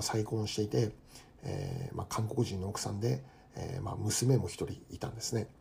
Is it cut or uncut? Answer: uncut